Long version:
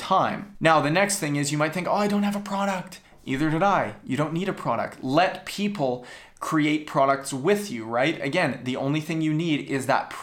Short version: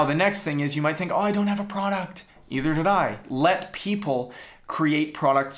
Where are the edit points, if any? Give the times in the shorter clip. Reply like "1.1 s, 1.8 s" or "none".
3.2 s